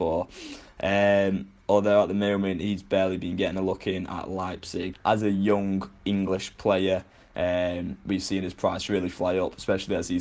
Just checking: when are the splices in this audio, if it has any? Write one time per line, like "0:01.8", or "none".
0:04.9

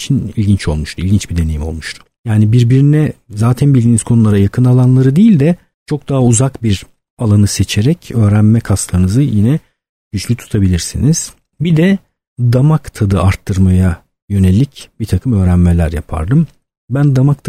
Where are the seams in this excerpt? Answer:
none

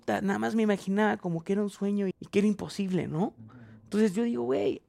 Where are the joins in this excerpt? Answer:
0:02.1

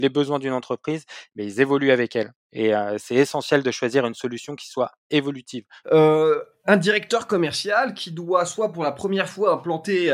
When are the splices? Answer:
0:05.8

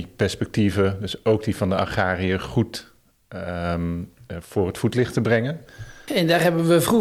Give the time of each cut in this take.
0:06.1

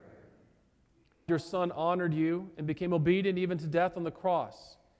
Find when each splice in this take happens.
0:01.3

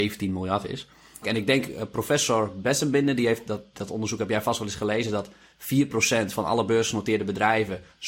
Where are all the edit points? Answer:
0:01.2

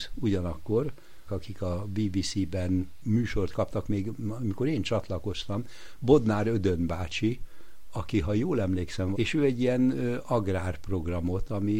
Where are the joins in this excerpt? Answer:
0:01.3
0:09.1

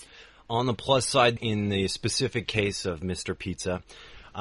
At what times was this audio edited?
0:01.4

